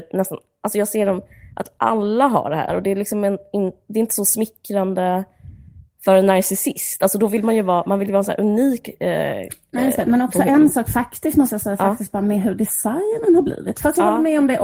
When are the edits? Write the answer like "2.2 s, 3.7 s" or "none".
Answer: 2.7 s